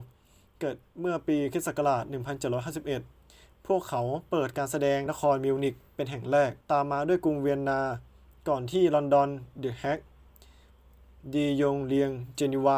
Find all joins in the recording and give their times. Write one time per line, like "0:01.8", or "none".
0:05.1
0:06.6